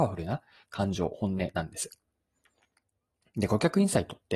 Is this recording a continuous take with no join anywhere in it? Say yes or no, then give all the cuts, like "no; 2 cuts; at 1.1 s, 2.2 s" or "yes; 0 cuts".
no; 1 cut; at 3.2 s